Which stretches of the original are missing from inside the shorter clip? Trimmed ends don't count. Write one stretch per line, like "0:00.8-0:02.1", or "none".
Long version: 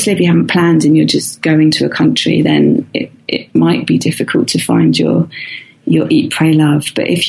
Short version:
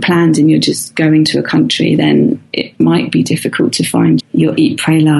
0:02.9-0:03.2
0:04.9-0:05.7